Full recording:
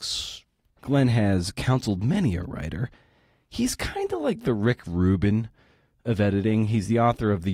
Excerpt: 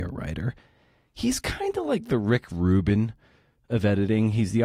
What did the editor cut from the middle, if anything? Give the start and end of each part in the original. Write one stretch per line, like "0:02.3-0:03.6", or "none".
none